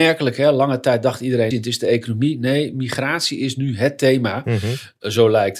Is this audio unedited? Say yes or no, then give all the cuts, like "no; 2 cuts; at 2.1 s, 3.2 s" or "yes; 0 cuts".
no; 1 cut; at 1.5 s